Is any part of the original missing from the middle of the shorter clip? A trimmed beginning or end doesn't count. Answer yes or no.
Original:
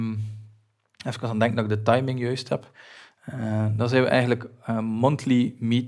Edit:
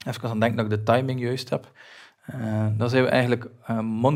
no